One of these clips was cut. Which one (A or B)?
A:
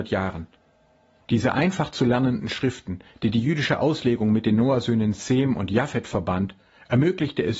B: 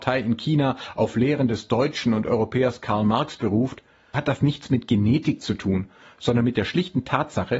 B